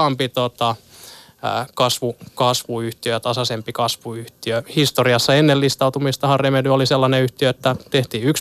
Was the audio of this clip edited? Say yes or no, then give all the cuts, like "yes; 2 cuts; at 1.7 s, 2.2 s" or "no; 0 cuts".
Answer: no; 0 cuts